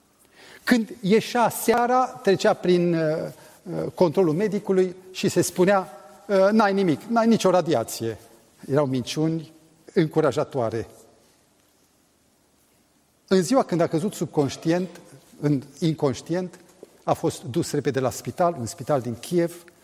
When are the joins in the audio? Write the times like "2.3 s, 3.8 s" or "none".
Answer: 9.9 s